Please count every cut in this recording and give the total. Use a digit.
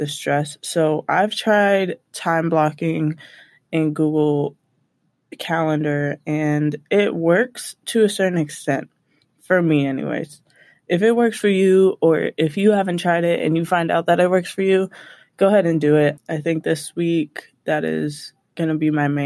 1